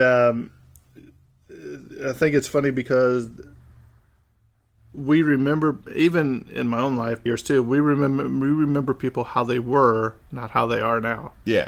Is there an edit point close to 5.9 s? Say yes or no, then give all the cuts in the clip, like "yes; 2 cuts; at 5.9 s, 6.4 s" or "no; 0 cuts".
no; 1 cut; at 7.3 s